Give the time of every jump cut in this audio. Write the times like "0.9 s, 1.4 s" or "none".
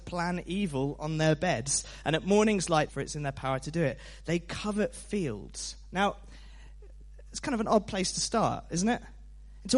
2.9 s